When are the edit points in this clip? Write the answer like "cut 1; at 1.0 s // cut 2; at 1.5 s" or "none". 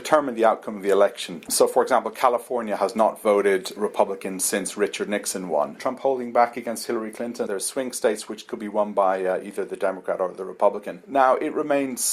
cut 1; at 5.8 s // cut 2; at 7.5 s